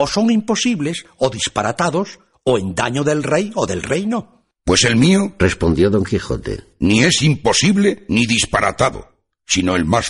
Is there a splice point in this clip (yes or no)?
no